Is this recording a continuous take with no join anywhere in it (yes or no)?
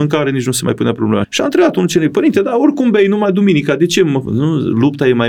no